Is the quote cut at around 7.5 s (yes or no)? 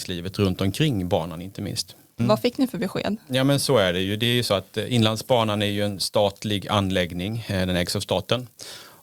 no